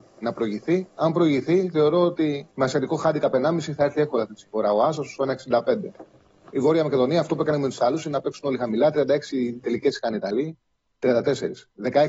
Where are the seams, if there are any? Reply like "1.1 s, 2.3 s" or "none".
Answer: 2.5 s